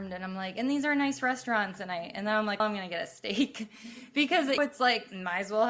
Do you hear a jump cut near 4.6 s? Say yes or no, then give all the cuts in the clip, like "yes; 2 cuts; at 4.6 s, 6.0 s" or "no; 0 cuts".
yes; 2 cuts; at 2.6 s, 4.6 s